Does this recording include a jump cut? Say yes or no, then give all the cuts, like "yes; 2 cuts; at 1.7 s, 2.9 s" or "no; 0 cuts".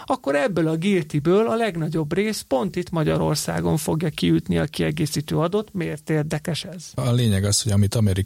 no; 0 cuts